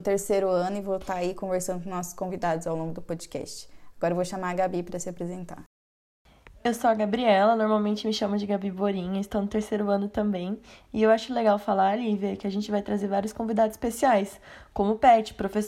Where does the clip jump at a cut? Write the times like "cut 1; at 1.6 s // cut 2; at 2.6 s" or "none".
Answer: none